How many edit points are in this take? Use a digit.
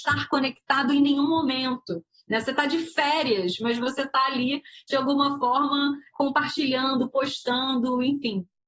0